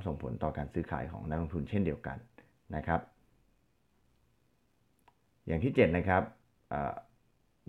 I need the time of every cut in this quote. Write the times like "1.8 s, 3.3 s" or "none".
none